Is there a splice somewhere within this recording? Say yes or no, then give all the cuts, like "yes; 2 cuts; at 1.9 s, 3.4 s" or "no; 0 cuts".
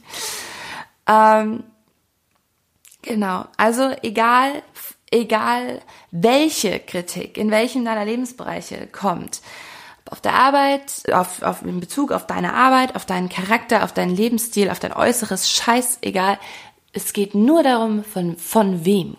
yes; 1 cut; at 11.1 s